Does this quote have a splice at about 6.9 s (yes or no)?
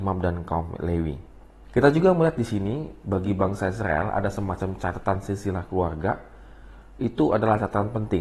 no